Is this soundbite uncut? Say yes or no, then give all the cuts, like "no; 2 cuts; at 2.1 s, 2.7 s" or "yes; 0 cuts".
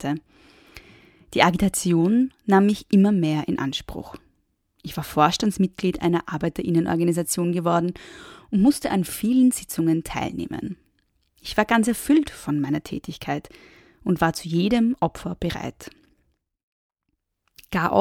yes; 0 cuts